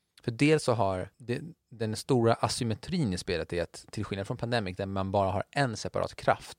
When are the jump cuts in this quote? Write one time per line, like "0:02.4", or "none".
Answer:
0:01.1